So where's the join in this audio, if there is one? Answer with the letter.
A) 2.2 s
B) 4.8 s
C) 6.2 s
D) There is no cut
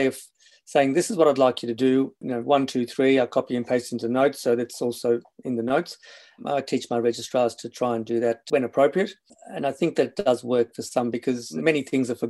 A